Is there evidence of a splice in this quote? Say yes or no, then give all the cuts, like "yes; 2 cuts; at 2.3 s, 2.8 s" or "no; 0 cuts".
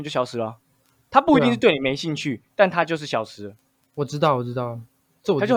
no; 0 cuts